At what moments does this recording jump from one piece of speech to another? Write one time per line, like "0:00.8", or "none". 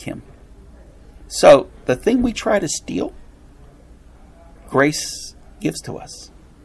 none

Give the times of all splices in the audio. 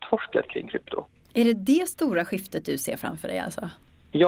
none

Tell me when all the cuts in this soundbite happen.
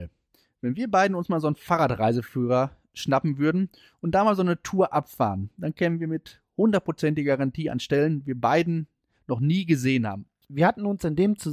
0:10.4

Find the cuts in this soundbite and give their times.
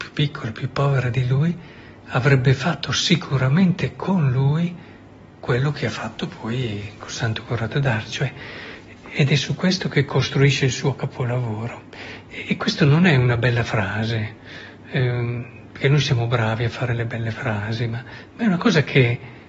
0:09.0
0:12.3

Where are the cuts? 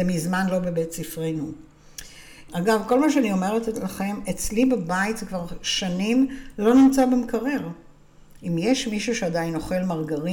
0:02.5
0:08.4

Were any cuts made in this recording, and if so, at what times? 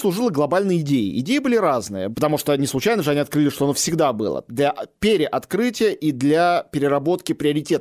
0:02.1

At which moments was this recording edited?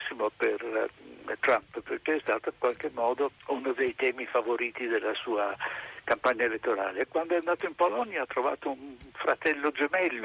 0:03.4

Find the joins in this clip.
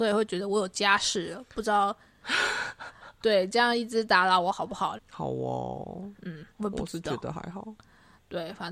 0:05.0
0:06.5

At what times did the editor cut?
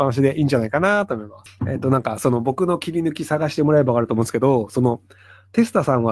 none

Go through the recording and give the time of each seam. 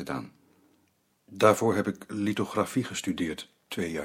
none

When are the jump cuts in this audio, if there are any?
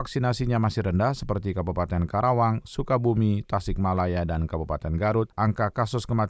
none

